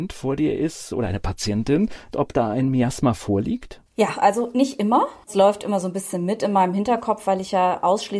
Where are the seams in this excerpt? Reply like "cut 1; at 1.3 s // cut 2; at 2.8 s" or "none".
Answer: cut 1; at 2.1 s